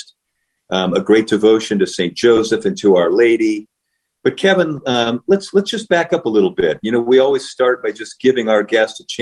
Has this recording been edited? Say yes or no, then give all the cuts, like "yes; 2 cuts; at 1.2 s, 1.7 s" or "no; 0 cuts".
no; 0 cuts